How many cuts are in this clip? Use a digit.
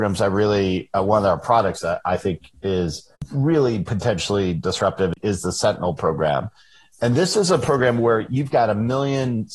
0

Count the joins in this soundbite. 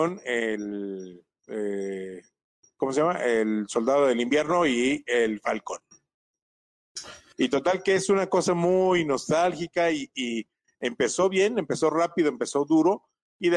1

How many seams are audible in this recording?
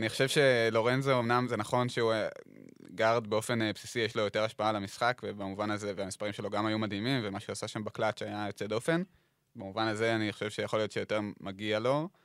0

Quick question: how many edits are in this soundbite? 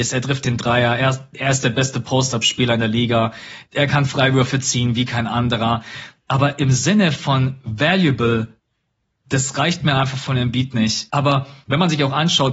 2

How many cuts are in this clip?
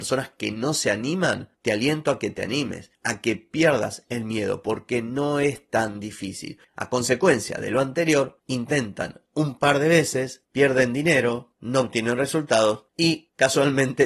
1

